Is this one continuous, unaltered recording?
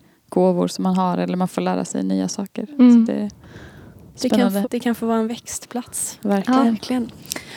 no; 1 cut; at 4.6 s

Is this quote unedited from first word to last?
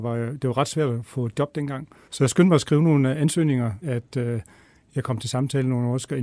no; 2 cuts; at 2.0 s, 3.8 s

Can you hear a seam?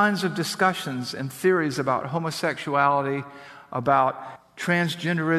no; 0 cuts

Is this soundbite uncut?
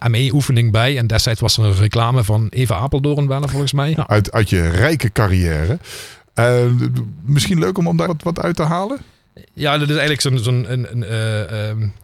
no; 2 cuts; at 3.9 s, 8.1 s

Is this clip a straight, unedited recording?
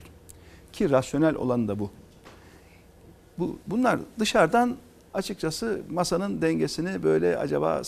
yes; 0 cuts

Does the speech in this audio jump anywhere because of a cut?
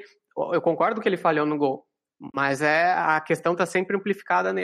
no; 0 cuts

